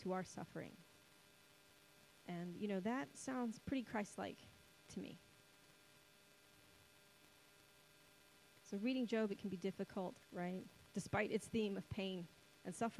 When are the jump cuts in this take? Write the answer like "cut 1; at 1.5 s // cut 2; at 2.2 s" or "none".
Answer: cut 1; at 10.2 s